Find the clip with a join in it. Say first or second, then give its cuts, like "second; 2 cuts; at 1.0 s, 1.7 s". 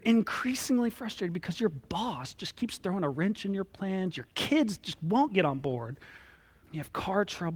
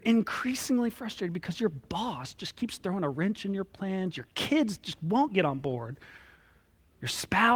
first; 1 cut; at 6.6 s